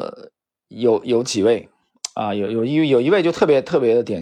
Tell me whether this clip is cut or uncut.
cut